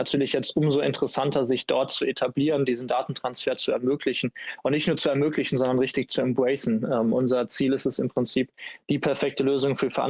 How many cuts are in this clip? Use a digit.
0